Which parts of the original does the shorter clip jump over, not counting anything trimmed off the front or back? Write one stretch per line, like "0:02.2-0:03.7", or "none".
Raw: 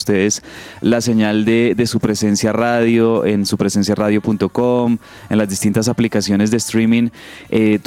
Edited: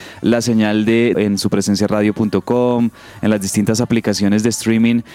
0:01.7-0:03.2